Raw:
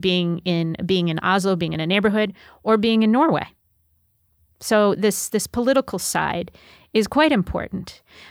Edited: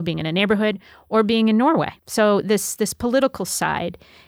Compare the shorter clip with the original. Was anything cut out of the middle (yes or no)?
yes